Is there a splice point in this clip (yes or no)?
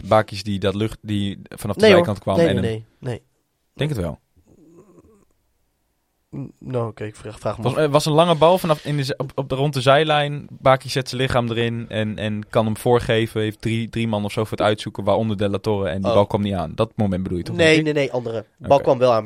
no